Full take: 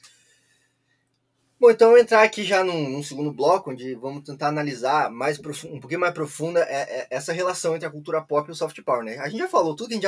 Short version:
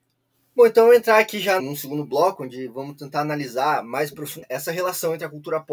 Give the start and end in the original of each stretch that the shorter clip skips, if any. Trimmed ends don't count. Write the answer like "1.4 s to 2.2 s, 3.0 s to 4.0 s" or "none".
2.6 s to 2.9 s, 5.7 s to 7.0 s